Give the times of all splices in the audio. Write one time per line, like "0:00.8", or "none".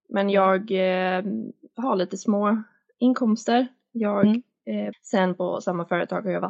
0:04.9